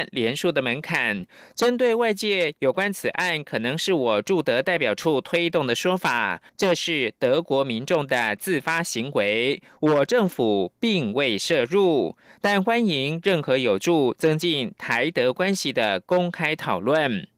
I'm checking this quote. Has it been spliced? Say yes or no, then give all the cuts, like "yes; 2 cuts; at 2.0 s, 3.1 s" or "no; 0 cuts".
yes; 1 cut; at 6.5 s